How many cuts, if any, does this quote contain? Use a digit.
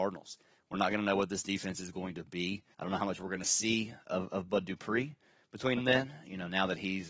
2